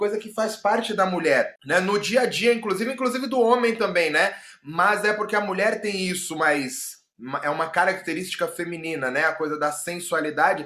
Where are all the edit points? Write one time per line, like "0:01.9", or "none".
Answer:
0:01.6